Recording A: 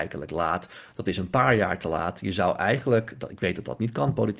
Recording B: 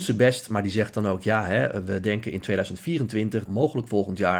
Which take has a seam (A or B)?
B